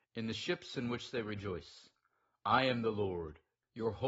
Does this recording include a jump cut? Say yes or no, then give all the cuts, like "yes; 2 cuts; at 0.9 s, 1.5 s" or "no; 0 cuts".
no; 0 cuts